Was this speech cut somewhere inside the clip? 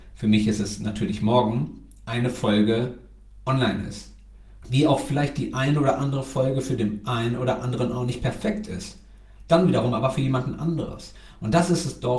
yes; 1 cut; at 4.6 s

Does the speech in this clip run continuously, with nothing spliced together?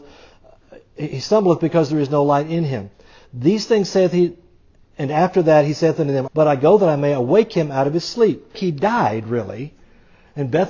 no; 2 cuts; at 6.3 s, 8.5 s

